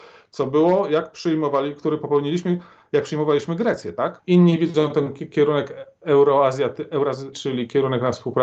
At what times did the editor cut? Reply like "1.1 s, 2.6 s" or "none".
4.2 s, 7.3 s